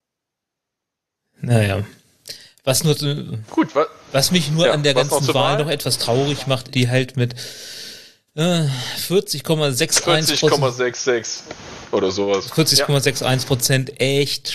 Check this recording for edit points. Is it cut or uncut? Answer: cut